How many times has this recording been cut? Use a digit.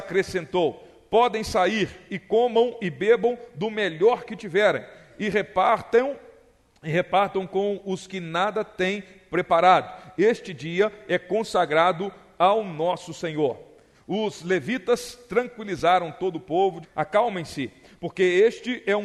2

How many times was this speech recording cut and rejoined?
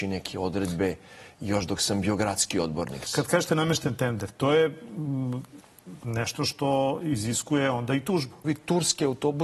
3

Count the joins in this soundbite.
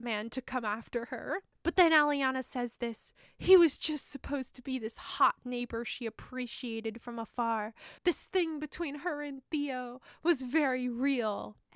2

